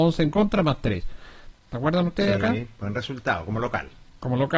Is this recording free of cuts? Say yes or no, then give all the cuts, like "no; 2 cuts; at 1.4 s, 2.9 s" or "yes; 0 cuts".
no; 1 cut; at 1.5 s